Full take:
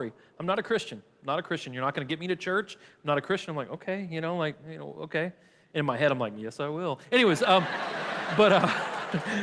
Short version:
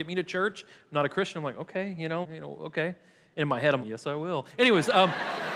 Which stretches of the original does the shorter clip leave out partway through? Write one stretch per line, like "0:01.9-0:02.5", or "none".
0:04.3-0:04.6
0:06.2-0:06.3